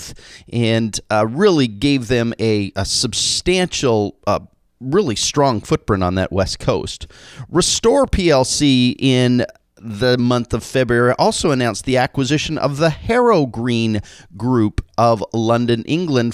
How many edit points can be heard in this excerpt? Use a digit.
0